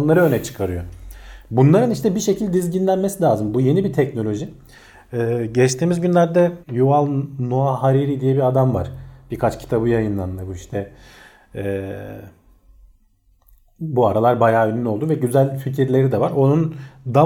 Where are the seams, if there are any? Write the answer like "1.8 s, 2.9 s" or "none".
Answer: 6.6 s